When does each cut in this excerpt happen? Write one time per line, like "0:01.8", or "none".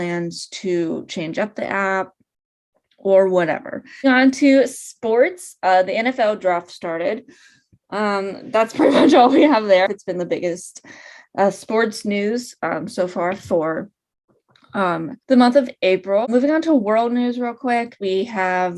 0:09.9
0:15.2